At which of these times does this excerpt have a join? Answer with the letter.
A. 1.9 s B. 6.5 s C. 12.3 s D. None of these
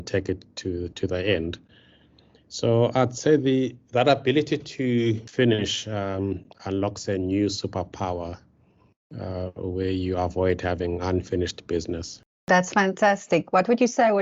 B